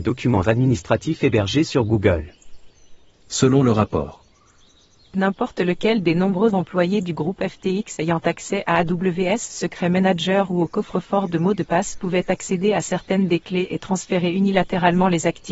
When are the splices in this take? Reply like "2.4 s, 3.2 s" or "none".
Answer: 3.2 s